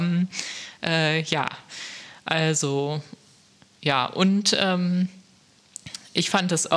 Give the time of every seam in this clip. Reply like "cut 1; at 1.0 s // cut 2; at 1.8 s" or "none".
none